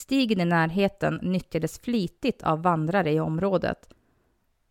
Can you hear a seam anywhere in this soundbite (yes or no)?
no